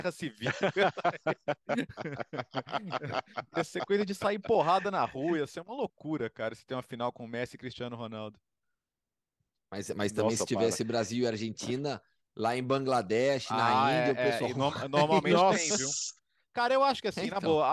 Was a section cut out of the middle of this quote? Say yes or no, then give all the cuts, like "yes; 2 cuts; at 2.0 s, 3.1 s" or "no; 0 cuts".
no; 0 cuts